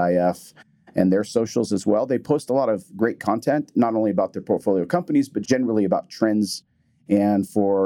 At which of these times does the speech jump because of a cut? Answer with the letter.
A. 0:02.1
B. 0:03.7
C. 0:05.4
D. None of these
C